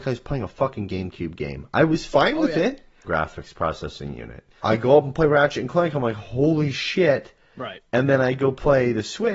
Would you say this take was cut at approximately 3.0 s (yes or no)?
yes